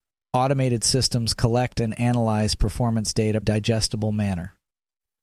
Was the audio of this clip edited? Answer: yes; 1 cut; at 3.4 s

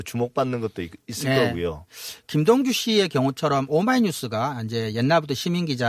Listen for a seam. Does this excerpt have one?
no; 0 cuts

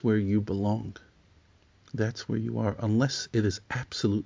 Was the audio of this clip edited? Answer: no; 0 cuts

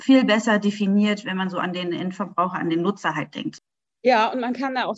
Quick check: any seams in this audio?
no; 0 cuts

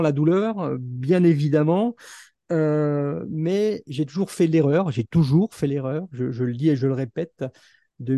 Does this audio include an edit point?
no; 0 cuts

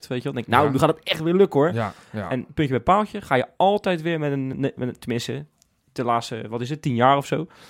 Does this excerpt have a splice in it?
no; 0 cuts

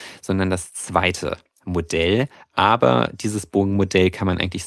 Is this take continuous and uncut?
yes; 0 cuts

